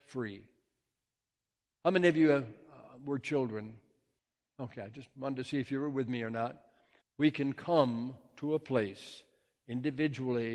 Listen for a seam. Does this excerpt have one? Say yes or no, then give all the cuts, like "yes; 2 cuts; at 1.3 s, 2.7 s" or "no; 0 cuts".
yes; 1 cut; at 7.0 s